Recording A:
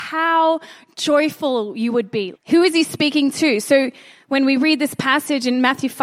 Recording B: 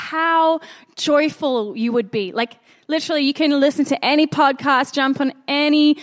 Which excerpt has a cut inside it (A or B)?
A